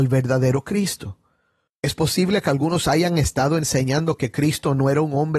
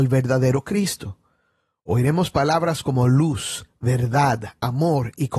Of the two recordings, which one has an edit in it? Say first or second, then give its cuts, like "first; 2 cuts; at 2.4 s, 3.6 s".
first; 1 cut; at 1.7 s